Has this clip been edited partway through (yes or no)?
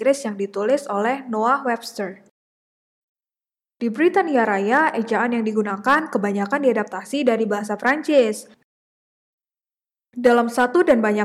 no